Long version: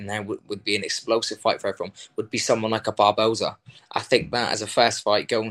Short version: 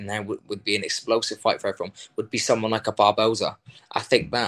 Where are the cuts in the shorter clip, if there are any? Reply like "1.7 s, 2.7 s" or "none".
none

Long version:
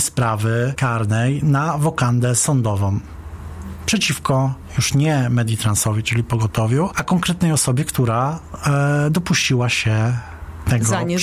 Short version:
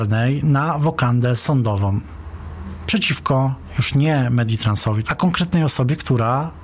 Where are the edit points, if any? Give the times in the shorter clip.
5.0 s

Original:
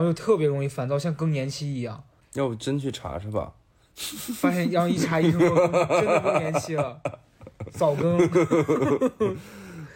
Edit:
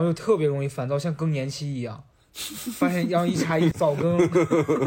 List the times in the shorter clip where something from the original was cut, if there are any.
2.1 s, 3.7 s

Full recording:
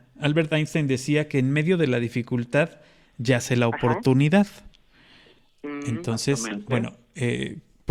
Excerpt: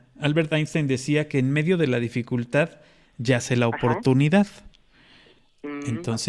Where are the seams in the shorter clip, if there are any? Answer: none

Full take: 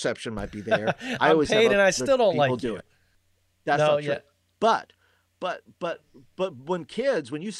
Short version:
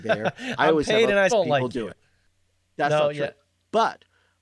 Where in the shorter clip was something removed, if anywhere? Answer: 1.3 s

